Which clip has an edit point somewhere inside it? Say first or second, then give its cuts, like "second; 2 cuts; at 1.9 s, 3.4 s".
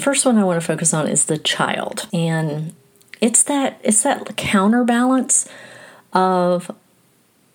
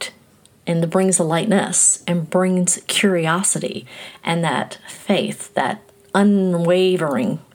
first; 1 cut; at 2.1 s